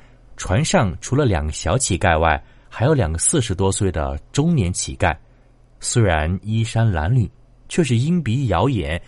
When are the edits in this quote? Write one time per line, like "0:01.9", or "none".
none